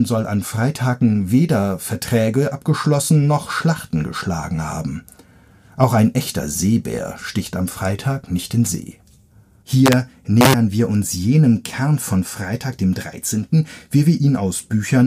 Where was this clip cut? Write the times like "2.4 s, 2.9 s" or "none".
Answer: 9.6 s